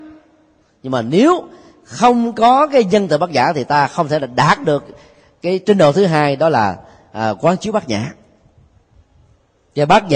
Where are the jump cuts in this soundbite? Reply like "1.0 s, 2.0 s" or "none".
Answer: none